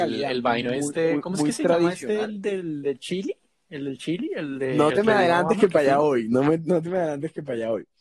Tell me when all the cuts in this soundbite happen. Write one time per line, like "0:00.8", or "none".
none